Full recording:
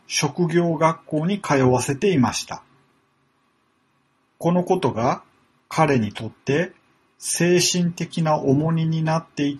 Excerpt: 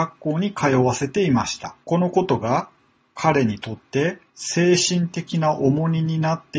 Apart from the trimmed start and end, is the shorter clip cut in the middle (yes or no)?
yes